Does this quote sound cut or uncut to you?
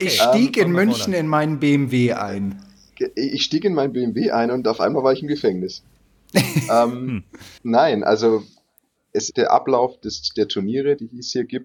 cut